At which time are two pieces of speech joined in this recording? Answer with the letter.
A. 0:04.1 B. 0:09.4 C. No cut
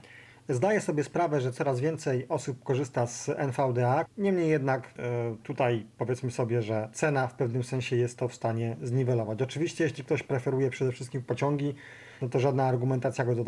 A